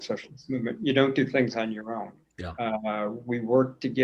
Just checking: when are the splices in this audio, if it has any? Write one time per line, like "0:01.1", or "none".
0:02.2